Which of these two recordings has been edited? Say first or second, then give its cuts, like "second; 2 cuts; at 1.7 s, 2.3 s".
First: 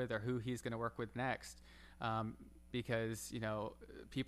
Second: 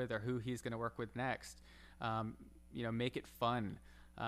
first; 1 cut; at 2.7 s